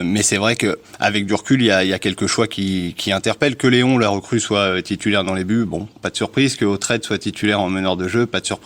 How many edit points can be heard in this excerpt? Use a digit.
0